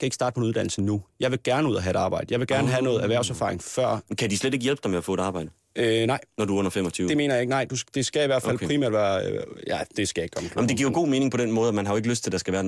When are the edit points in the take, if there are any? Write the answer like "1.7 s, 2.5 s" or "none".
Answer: none